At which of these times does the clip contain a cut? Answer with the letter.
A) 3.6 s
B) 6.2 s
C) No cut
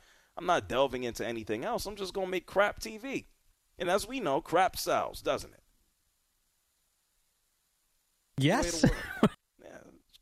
C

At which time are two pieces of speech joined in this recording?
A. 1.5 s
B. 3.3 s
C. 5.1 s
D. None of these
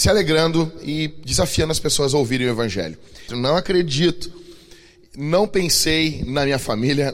B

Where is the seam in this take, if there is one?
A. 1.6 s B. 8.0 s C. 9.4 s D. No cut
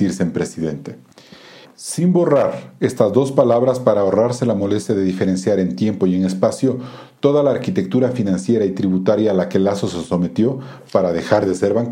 A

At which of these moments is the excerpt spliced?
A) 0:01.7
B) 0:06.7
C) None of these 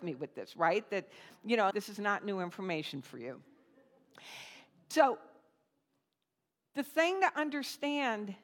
A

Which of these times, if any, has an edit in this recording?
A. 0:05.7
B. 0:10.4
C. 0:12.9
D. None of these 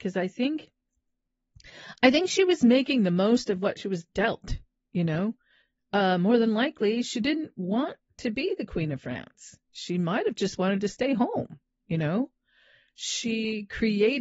D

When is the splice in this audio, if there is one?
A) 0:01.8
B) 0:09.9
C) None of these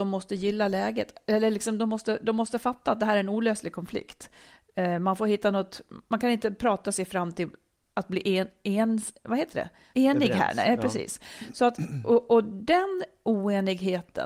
B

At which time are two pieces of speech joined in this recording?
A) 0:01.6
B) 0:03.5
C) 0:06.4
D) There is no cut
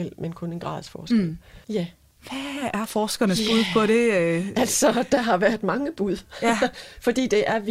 A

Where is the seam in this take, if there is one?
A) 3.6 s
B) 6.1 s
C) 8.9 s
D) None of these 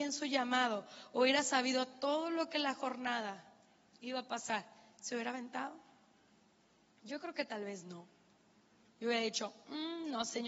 D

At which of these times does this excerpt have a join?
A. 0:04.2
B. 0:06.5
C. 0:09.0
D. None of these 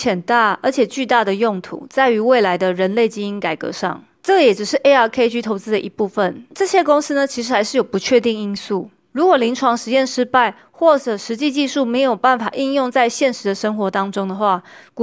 D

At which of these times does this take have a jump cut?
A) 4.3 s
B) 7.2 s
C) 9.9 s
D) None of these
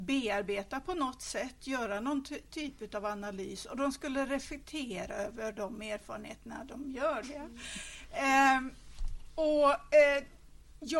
B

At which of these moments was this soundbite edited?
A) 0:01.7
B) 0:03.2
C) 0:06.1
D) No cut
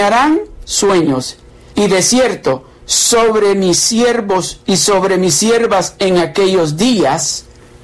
A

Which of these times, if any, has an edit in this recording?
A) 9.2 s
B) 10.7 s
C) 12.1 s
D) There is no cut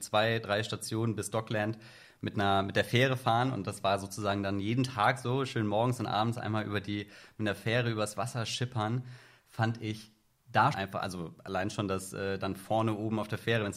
B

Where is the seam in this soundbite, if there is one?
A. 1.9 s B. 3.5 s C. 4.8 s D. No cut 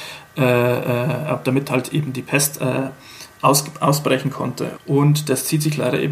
C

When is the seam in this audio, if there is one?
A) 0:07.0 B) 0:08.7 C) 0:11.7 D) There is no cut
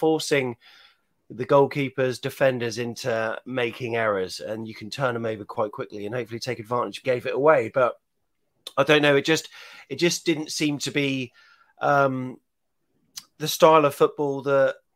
A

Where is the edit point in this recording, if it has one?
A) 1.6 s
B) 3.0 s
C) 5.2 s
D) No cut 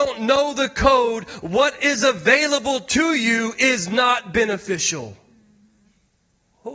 D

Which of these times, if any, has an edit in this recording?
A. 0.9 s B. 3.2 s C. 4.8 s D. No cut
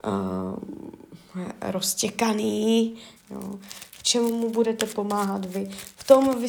B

